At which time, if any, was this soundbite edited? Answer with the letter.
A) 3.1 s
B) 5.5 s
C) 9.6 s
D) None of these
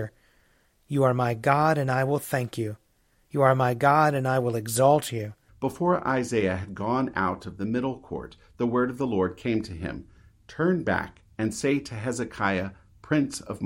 B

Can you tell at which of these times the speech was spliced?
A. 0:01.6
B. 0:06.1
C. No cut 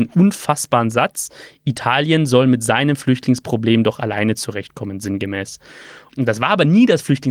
B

